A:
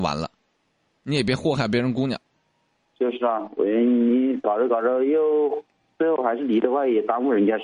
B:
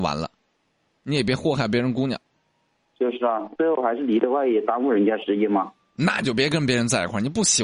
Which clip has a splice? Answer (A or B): B